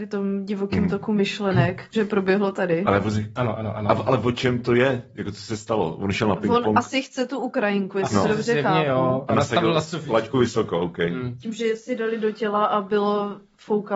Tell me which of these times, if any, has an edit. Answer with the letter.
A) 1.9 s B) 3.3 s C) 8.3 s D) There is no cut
A